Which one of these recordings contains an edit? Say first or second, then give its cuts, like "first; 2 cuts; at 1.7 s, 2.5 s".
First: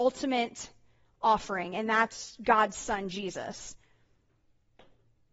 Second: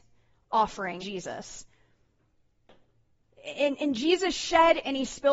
second; 1 cut; at 1.0 s